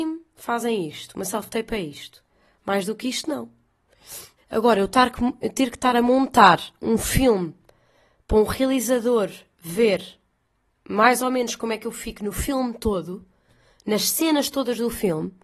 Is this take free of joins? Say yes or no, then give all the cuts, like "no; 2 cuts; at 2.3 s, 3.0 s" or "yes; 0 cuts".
no; 1 cut; at 4.4 s